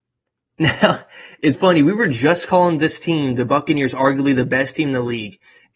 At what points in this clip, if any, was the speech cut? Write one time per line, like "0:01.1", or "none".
0:01.5

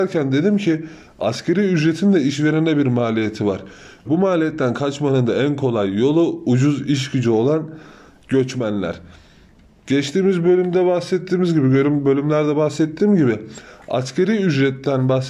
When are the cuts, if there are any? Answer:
0:04.0
0:09.8

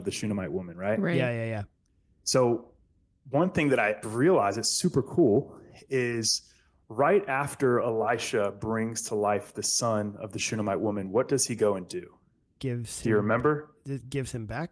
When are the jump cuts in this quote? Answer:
0:04.0

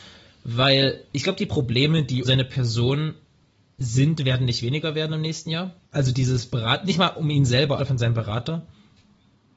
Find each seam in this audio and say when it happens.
0:02.2
0:05.8
0:07.8

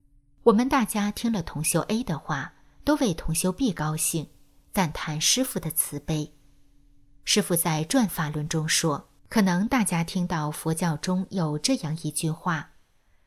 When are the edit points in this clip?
0:09.2

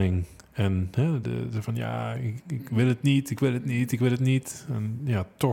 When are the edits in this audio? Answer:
0:01.2
0:02.4

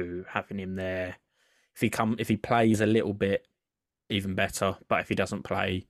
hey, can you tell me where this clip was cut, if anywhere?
none

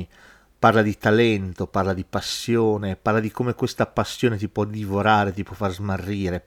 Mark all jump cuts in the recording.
none

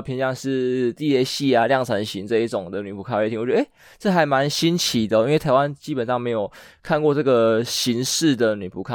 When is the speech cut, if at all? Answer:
none

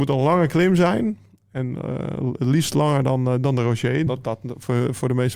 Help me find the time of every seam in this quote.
0:04.1

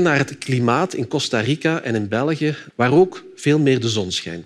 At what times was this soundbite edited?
0:02.7

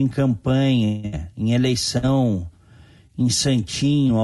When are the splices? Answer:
none

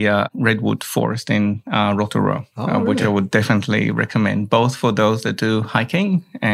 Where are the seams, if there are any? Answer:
none

